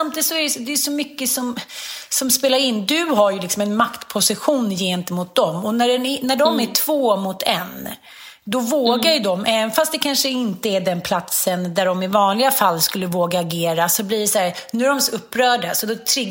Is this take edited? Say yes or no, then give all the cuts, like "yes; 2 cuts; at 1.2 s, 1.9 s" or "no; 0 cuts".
no; 0 cuts